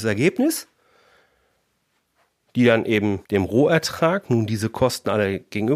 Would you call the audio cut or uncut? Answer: cut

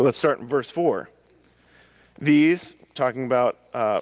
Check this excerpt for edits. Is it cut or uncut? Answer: uncut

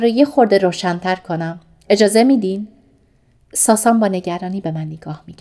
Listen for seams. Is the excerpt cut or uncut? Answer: uncut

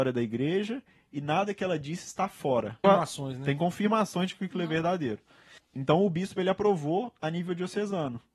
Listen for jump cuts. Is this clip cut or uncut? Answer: cut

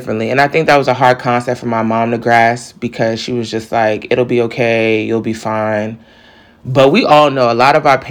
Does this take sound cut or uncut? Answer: uncut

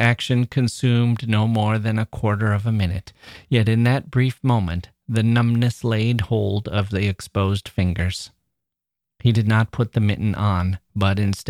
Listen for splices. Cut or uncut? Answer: uncut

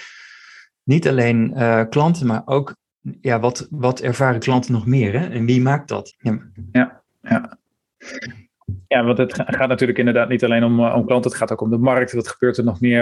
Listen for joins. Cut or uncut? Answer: cut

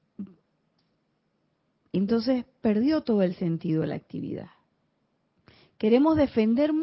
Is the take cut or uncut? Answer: uncut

